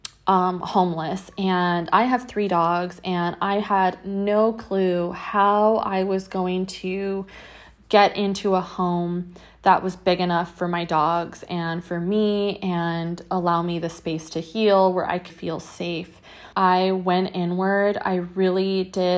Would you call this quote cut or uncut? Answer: cut